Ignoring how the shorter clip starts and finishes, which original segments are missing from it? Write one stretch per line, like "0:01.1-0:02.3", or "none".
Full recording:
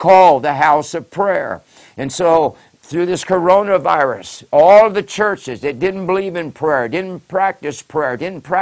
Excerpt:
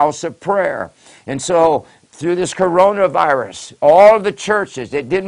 none